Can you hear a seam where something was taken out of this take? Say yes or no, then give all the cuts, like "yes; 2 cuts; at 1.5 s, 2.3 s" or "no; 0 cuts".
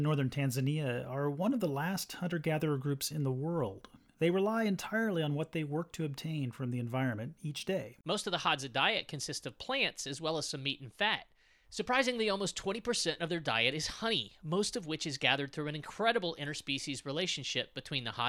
yes; 1 cut; at 4.1 s